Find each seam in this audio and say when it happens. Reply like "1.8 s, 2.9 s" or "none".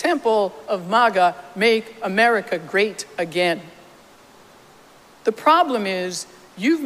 none

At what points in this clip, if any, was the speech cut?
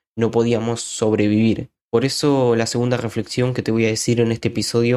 1.8 s

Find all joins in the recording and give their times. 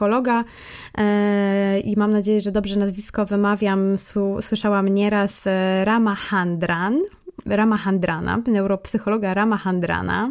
7.5 s

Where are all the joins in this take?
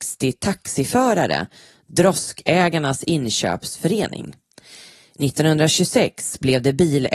none

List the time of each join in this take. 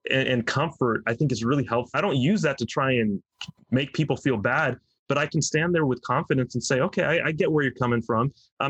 1.9 s

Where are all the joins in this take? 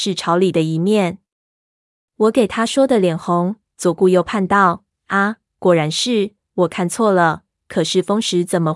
none

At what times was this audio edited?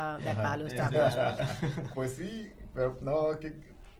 1.9 s

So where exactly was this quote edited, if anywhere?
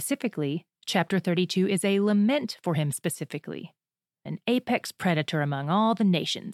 4.3 s

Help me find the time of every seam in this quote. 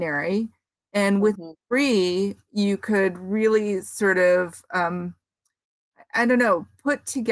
none

